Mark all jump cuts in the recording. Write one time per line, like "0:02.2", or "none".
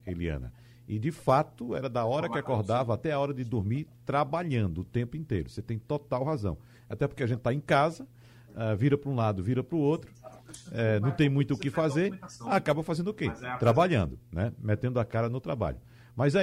none